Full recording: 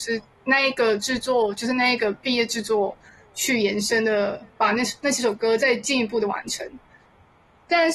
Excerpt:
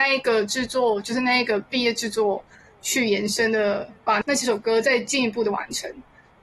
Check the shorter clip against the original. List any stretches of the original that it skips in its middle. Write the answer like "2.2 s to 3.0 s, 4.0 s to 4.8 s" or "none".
4.7 s to 5.0 s

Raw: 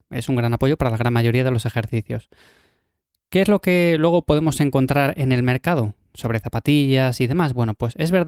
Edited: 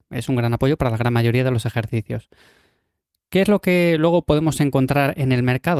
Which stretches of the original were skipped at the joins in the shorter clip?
none

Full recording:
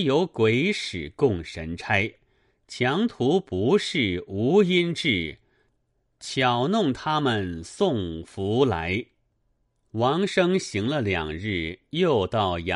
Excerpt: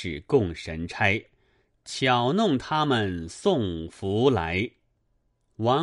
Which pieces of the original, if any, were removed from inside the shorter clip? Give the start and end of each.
2.6 s to 6.1 s

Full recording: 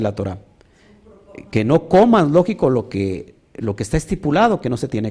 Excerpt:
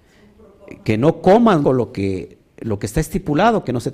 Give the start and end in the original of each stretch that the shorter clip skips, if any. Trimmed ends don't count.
2.3 s to 2.6 s

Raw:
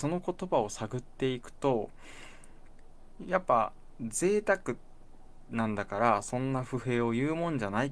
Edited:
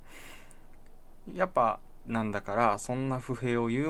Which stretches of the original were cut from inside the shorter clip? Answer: 4.0 s to 5.5 s

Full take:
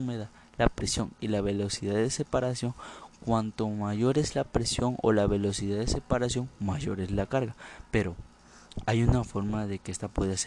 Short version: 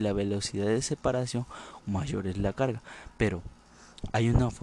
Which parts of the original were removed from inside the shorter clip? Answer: 3.1 s to 6.6 s

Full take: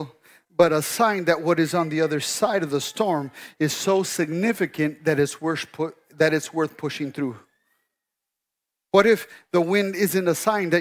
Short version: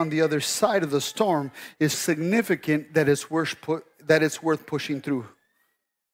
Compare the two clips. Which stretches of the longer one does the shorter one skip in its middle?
3.7 s to 4.0 s

